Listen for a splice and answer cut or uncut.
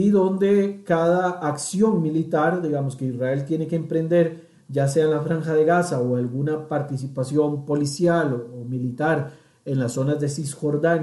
uncut